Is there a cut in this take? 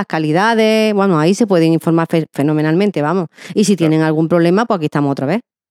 no; 0 cuts

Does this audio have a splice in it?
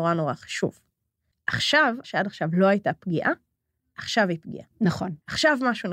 yes; 1 cut; at 2.0 s

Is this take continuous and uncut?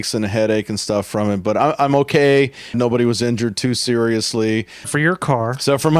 no; 2 cuts; at 2.7 s, 4.8 s

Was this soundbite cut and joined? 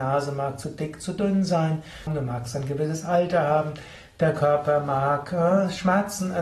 yes; 1 cut; at 2.1 s

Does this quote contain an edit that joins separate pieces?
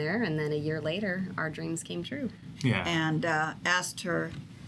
yes; 1 cut; at 2.6 s

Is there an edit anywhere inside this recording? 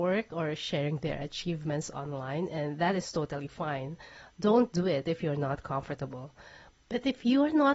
no; 0 cuts

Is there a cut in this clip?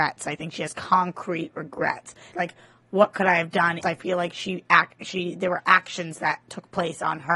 yes; 2 cuts; at 2.3 s, 3.8 s

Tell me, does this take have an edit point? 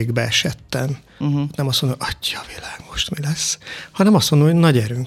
no; 0 cuts

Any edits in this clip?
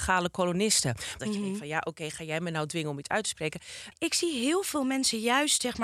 yes; 2 cuts; at 1.2 s, 3.9 s

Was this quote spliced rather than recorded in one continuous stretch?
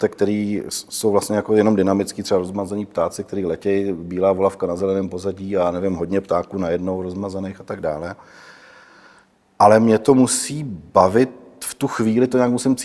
no; 0 cuts

